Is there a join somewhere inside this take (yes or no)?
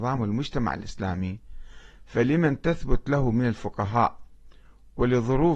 no